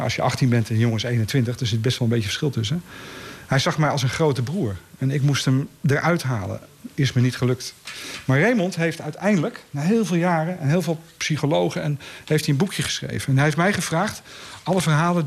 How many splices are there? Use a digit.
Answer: 0